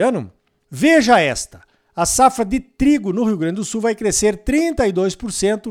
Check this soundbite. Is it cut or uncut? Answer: uncut